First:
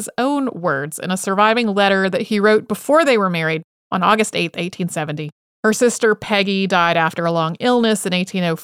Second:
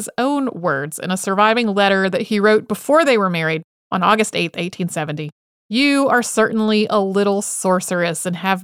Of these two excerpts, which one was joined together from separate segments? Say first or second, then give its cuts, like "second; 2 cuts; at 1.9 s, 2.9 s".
first; 1 cut; at 5.5 s